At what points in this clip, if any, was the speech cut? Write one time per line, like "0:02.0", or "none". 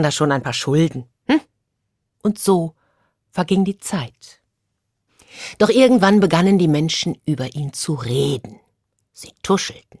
none